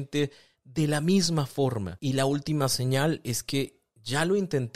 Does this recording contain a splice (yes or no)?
yes